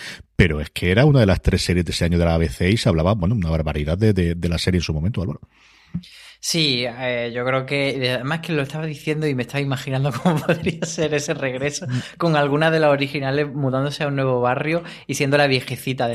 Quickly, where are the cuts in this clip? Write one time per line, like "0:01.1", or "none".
none